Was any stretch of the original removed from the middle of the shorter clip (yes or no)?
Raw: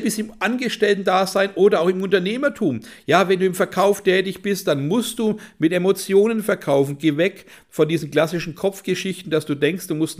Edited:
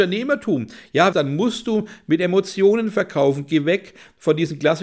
yes